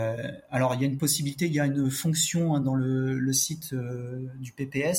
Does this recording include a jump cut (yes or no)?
no